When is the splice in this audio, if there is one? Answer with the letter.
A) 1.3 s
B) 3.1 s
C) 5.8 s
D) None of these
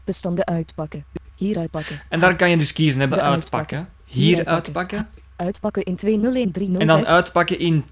B